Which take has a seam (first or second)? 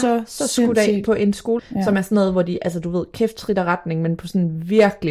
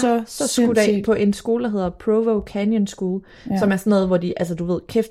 first